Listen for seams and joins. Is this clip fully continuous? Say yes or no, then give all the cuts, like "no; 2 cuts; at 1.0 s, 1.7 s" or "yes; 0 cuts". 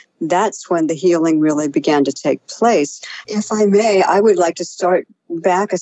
no; 1 cut; at 3.3 s